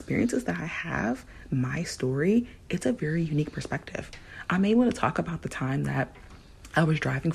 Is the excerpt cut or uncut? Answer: uncut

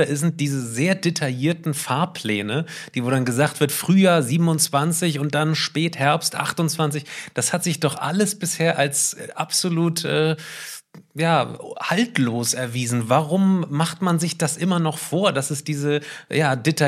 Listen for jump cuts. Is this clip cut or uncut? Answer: uncut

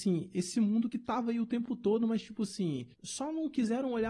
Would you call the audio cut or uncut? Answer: cut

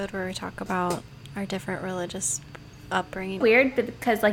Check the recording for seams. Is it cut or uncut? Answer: cut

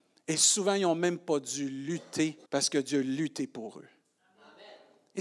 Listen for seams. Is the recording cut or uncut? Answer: cut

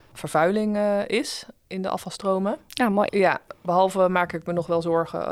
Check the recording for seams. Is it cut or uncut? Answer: cut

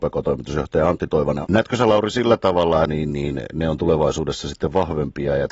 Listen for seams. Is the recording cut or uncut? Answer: cut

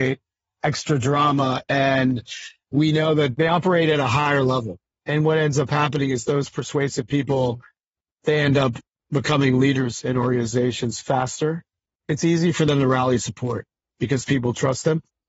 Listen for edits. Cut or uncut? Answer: uncut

